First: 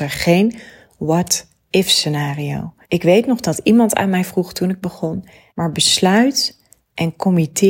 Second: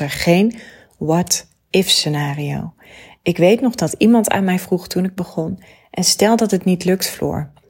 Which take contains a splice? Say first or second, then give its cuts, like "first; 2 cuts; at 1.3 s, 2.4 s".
first; 2 cuts; at 2.8 s, 5.5 s